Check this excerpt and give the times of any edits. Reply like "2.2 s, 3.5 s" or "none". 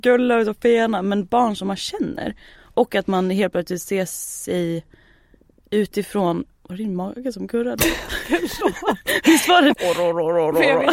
9.7 s